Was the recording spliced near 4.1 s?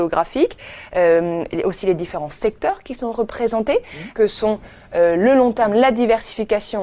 yes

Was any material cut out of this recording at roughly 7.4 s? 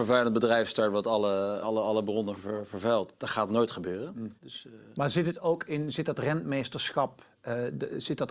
no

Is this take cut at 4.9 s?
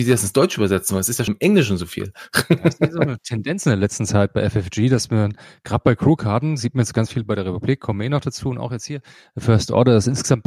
no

